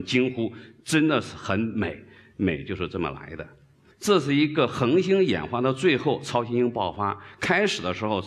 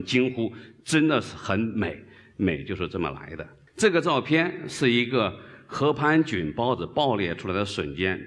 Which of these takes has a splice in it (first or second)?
second